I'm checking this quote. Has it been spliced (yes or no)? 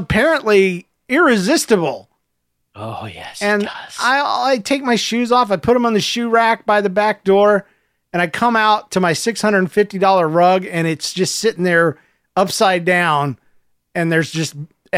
no